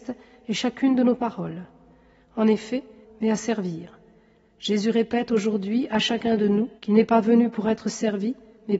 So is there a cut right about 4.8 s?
no; 2 cuts; at 3.0 s, 6.8 s

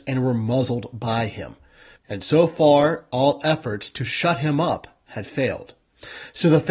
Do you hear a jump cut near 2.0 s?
yes; 1 cut; at 2.0 s

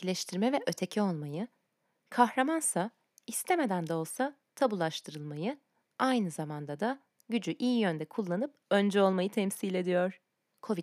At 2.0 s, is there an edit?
no; 0 cuts

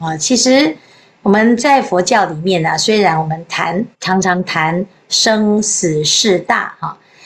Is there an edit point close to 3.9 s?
yes; 1 cut; at 3.9 s

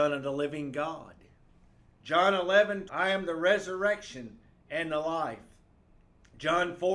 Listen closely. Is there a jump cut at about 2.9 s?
yes; 2 cuts; at 1.9 s, 2.9 s

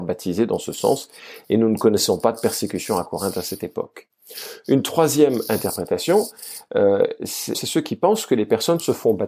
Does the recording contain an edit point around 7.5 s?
yes; 1 cut; at 7.5 s

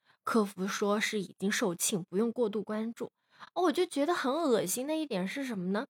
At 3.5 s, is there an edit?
no; 0 cuts

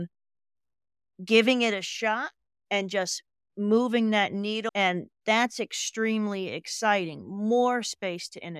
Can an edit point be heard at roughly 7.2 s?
no; 1 cut; at 4.7 s

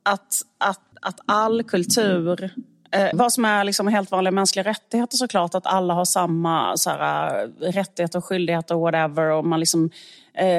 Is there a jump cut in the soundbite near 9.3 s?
no; 2 cuts; at 0.9 s, 3.1 s

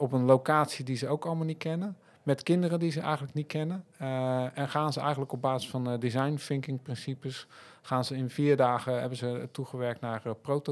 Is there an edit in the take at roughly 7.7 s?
no; 0 cuts

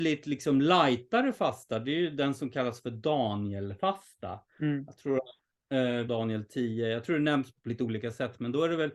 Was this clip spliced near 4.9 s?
no; 2 cuts; at 6.1 s, 7.6 s

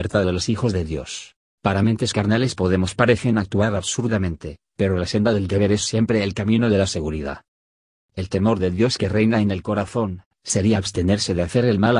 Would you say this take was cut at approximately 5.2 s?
no; 2 cuts; at 1.5 s, 8.0 s

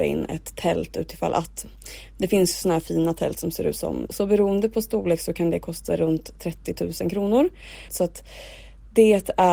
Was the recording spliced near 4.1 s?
yes; 2 cuts; at 4.1 s, 7.9 s

